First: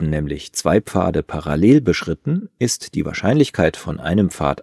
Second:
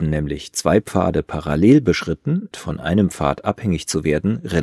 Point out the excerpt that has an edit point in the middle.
second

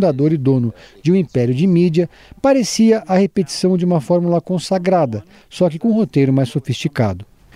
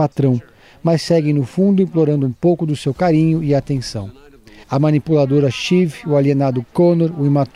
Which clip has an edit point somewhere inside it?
second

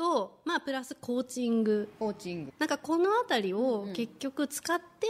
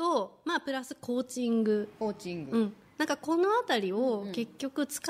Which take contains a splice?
first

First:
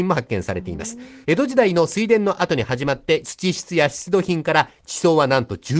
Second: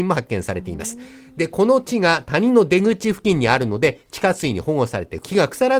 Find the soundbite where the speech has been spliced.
first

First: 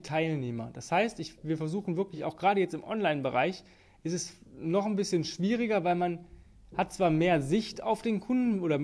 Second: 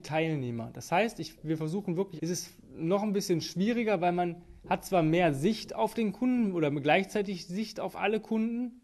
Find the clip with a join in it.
second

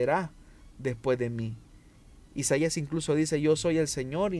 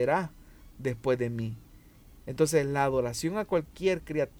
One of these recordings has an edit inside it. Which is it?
second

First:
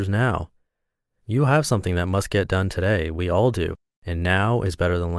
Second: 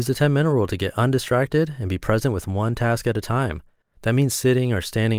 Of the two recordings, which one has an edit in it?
second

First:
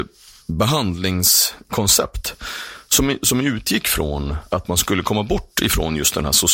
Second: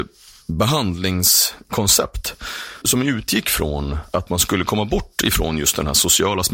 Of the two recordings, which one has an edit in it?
second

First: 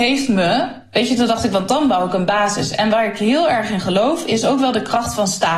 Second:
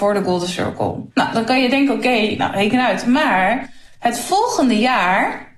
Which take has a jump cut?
second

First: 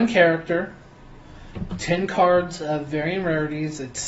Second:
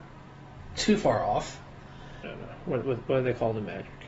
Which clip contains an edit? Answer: second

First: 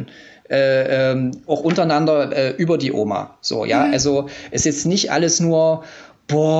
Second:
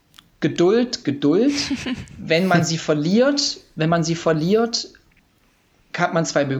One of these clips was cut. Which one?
second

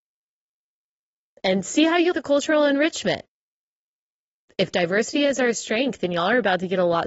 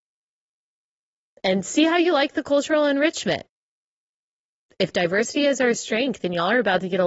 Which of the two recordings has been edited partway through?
first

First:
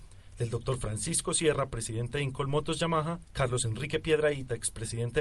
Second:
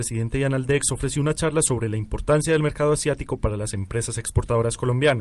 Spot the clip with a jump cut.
first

